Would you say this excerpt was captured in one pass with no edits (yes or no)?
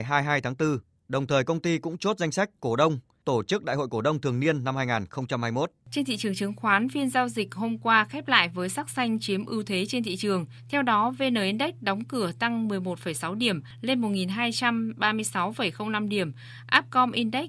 yes